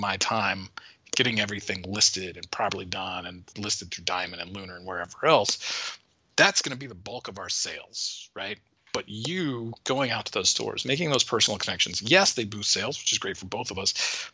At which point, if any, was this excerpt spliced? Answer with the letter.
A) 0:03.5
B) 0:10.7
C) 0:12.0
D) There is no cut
A